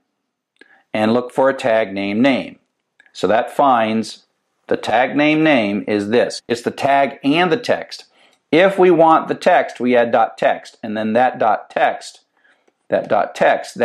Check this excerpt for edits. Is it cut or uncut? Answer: cut